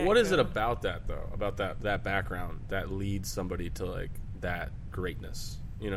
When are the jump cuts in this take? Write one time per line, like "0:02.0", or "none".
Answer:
none